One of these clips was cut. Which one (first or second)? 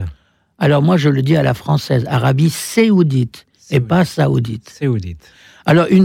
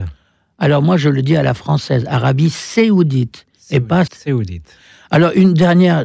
second